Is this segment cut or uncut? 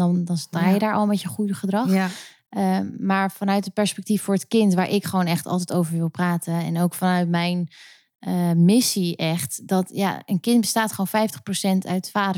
uncut